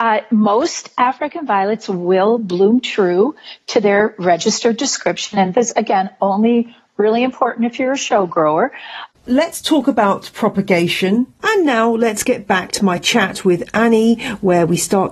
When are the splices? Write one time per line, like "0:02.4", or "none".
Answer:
0:09.1
0:11.4